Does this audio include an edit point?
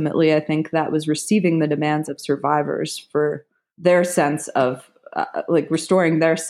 no; 0 cuts

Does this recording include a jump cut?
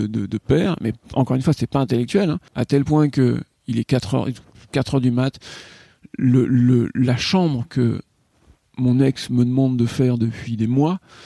yes; 1 cut; at 2.5 s

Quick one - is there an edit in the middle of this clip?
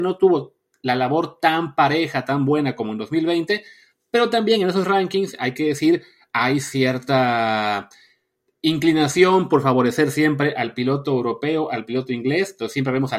no; 0 cuts

